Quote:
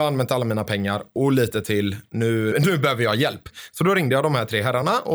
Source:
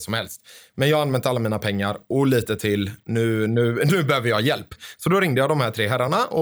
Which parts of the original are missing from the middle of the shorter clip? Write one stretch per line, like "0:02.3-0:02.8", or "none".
0:03.5-0:03.8